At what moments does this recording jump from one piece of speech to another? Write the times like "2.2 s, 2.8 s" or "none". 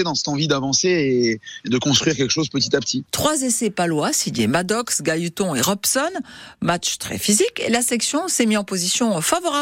3.0 s